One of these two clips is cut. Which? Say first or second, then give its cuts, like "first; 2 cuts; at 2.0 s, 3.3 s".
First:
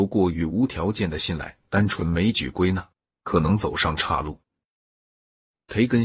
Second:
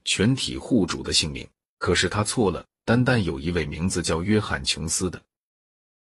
second; 1 cut; at 1.8 s